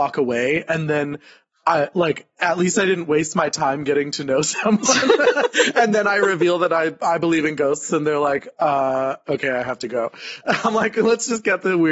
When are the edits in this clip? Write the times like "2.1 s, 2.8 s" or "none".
none